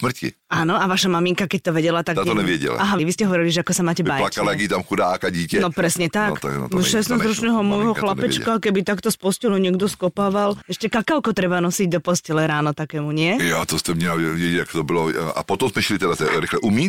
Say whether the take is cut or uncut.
cut